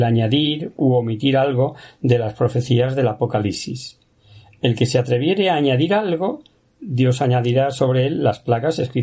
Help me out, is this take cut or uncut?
uncut